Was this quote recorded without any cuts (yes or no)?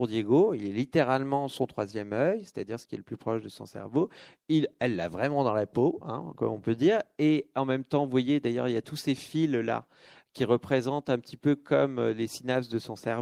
yes